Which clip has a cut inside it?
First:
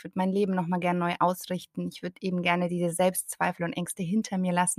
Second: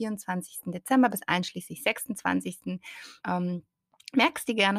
second; 1 cut; at 3.2 s

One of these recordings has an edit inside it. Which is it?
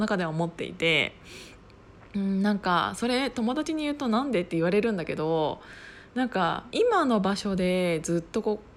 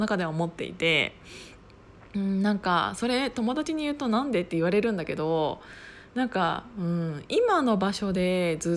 first; 1 cut; at 6.7 s

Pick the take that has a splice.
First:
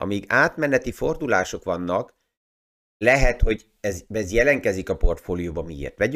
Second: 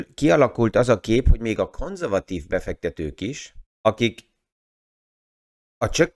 second; 1 cut; at 3.7 s

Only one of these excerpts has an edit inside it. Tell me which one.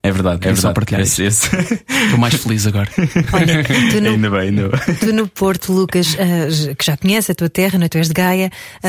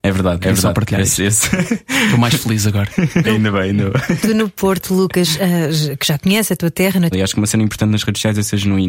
second; 2 cuts; at 3.2 s, 7.1 s

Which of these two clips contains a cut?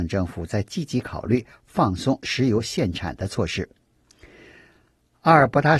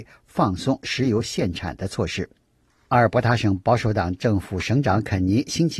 second; 1 cut; at 2.7 s

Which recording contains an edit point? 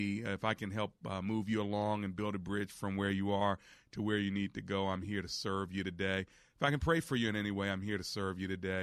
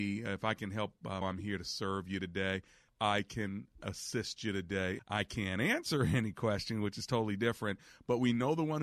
second; 3 cuts; at 1.2 s, 2.9 s, 5.0 s

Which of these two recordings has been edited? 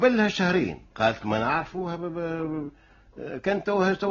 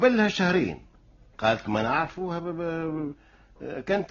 first; 1 cut; at 0.9 s

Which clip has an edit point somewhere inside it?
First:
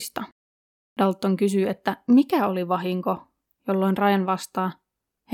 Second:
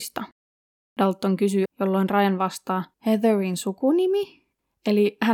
second; 2 cuts; at 1.7 s, 2.9 s

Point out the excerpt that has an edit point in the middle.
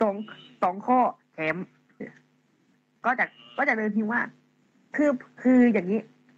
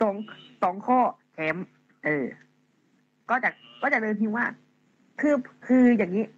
first; 1 cut; at 2.0 s

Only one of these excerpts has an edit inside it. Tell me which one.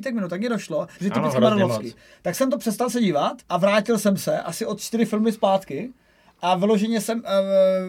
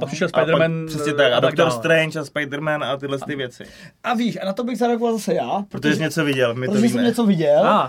first; 2 cuts; at 1.0 s, 3.4 s

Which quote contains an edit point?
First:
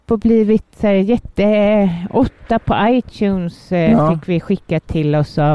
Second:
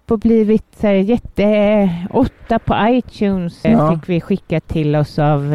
second; 1 cut; at 3.6 s

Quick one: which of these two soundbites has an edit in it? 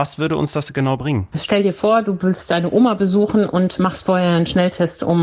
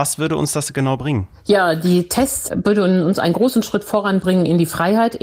first; 1 cut; at 1.3 s

